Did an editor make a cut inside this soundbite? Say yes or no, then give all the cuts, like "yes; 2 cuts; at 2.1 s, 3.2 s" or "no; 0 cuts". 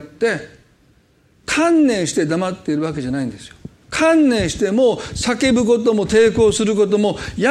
no; 0 cuts